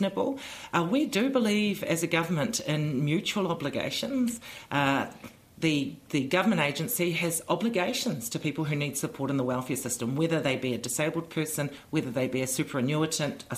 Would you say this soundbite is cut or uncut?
uncut